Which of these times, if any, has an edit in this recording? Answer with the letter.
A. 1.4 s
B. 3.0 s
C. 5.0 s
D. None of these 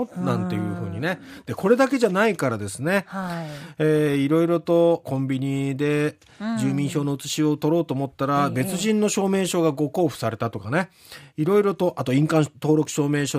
C